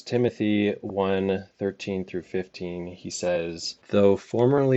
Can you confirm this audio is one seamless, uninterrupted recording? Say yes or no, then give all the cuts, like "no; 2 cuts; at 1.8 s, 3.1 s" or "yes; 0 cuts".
no; 1 cut; at 3.8 s